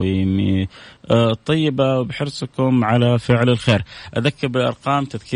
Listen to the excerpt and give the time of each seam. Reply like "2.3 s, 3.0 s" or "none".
1.0 s

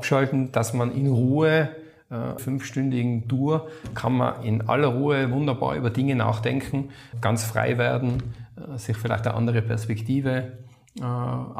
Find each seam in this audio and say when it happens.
2.4 s, 7.1 s

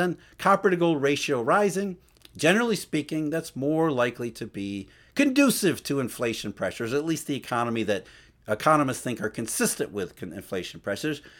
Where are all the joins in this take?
none

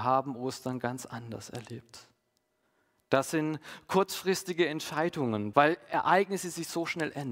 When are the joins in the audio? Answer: 5.5 s

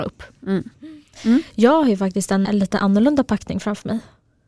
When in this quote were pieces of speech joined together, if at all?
2.4 s

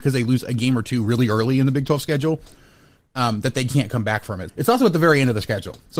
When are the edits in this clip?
4.5 s

